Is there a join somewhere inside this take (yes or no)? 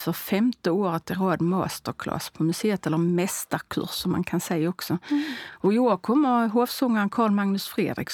no